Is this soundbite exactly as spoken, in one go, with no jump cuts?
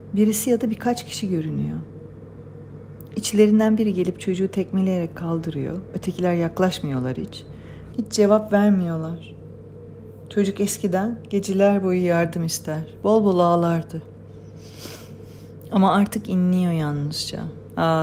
no; 1 cut; at 7.9 s

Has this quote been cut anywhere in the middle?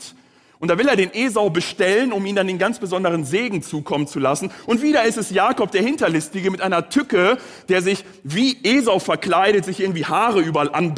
no; 0 cuts

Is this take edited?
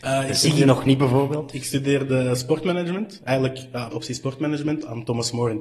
yes; 1 cut; at 3.9 s

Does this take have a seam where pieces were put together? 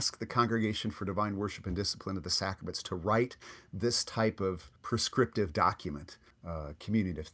yes; 2 cuts; at 4.8 s, 6.3 s

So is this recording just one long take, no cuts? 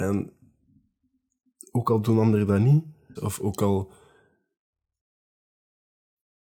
no; 1 cut; at 3.2 s

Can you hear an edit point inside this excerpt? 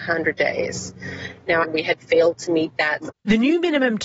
yes; 2 cuts; at 1.6 s, 3.1 s

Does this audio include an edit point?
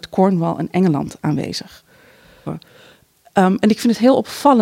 yes; 1 cut; at 2.5 s

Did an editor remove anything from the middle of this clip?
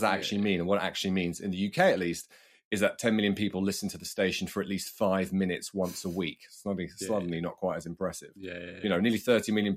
no; 0 cuts

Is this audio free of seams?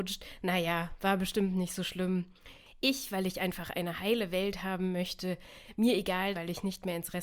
no; 1 cut; at 6.3 s

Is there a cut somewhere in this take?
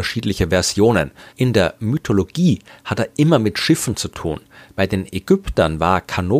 yes; 1 cut; at 1.3 s

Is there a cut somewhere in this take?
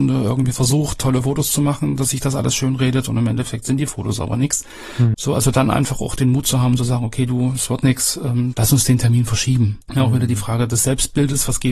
yes; 3 cuts; at 5.1 s, 8.5 s, 9.8 s

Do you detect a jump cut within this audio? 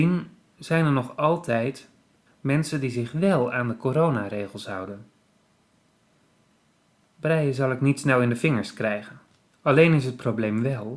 yes; 2 cuts; at 2.3 s, 9.5 s

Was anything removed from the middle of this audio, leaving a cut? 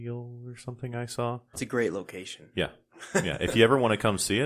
yes; 1 cut; at 1.5 s

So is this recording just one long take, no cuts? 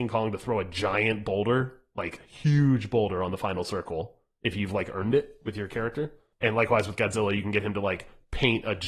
yes; 0 cuts

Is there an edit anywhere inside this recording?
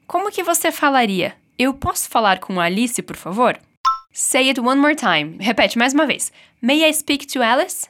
yes; 2 cuts; at 4.0 s, 5.4 s

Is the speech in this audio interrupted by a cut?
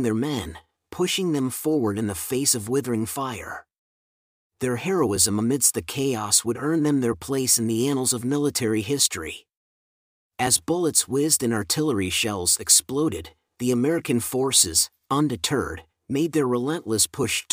no; 0 cuts

